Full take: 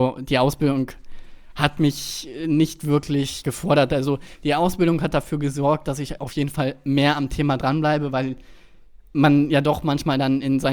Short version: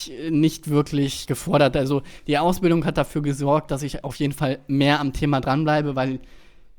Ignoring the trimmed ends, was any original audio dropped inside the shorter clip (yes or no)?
no